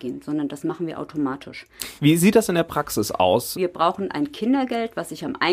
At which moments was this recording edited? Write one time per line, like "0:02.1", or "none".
0:02.0
0:03.5